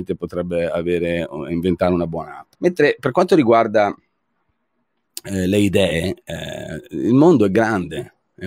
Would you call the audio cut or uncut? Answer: cut